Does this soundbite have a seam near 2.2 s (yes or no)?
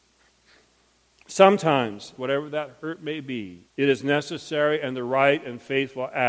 yes